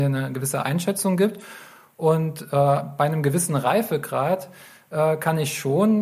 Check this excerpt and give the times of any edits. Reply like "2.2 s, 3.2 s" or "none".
none